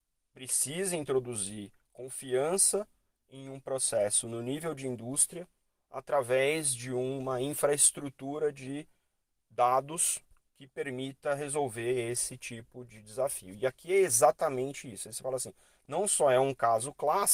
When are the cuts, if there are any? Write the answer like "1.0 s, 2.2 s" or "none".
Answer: none